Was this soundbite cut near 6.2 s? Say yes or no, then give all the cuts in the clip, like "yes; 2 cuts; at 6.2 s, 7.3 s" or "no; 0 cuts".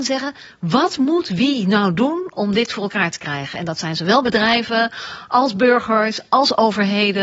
no; 0 cuts